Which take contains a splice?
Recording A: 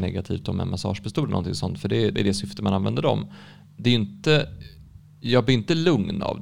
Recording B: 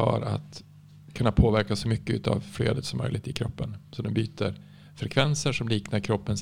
A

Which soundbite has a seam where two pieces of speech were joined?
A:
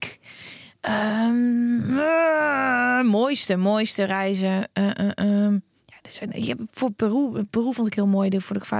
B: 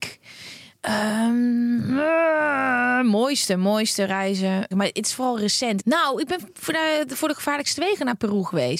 B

